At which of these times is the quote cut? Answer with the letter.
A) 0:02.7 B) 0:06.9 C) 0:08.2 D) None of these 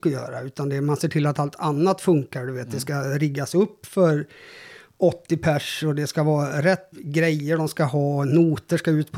B